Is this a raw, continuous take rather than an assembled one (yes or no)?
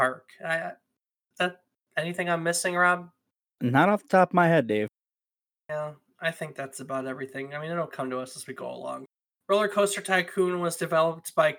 yes